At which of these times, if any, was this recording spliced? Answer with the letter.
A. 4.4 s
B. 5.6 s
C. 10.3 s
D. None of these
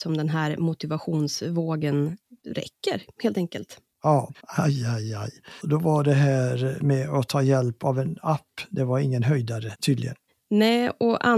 A